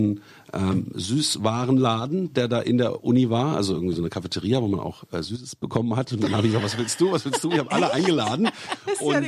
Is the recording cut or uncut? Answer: uncut